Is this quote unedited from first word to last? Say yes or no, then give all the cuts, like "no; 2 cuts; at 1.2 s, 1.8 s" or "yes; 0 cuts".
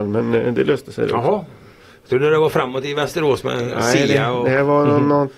yes; 0 cuts